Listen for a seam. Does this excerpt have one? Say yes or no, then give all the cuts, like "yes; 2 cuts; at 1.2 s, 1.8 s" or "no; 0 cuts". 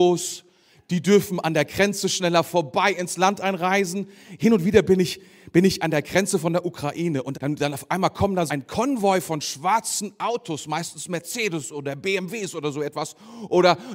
yes; 2 cuts; at 7.3 s, 8.5 s